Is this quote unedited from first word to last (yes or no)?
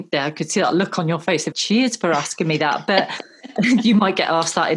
no